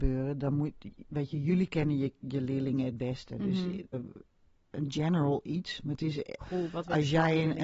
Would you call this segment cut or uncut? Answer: cut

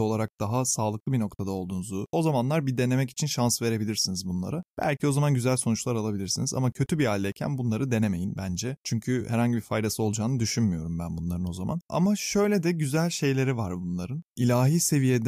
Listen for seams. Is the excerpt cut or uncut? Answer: cut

